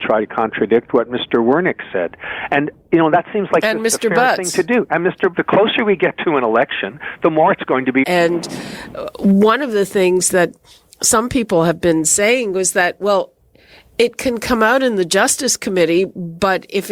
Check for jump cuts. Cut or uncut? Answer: cut